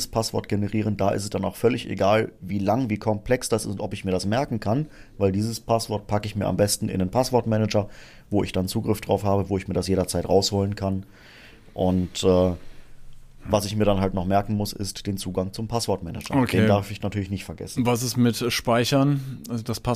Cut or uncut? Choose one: uncut